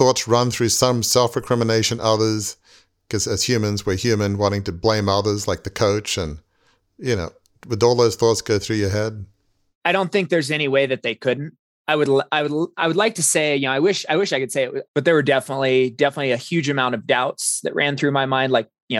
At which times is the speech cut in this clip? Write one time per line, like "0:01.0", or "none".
0:14.9